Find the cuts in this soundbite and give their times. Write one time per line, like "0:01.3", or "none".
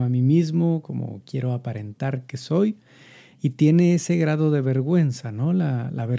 none